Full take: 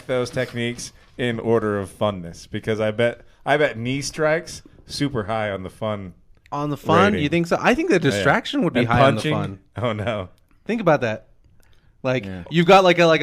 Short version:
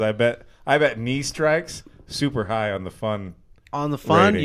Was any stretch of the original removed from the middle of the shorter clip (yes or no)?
no